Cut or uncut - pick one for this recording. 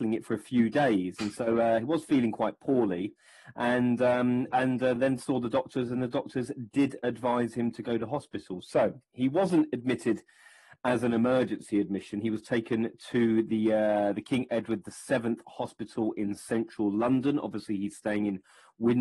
uncut